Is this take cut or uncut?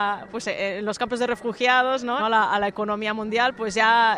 cut